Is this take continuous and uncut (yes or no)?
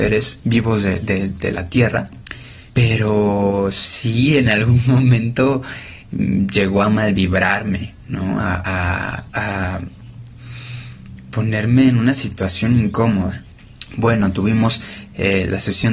yes